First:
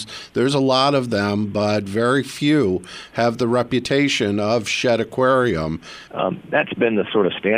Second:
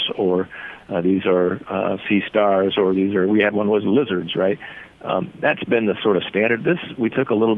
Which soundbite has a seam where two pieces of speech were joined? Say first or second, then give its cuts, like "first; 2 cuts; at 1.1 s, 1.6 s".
first; 1 cut; at 6.1 s